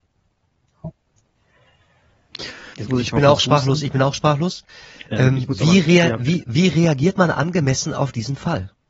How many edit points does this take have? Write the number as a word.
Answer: one